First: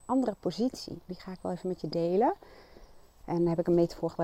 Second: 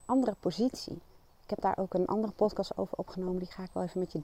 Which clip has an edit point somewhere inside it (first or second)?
first